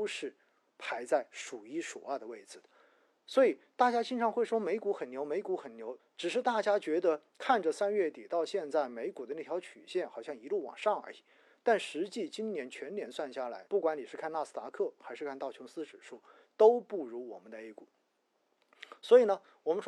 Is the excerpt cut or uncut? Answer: cut